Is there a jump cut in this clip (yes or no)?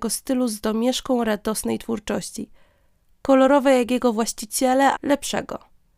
yes